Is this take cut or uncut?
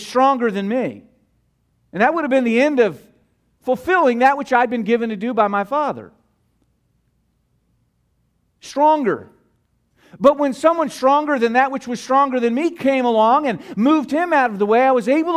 uncut